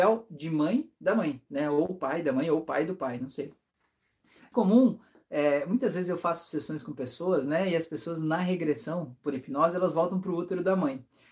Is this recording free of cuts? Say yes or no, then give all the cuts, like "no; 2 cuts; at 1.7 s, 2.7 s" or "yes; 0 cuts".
no; 1 cut; at 4.5 s